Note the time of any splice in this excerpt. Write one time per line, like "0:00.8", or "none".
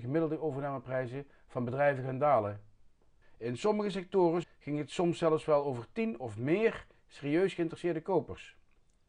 0:03.2
0:04.4